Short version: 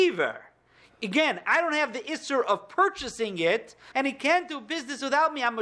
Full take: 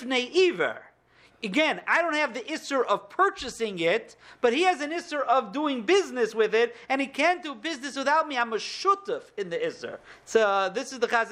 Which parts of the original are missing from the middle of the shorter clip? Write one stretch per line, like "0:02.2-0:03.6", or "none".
0:04.3-0:06.9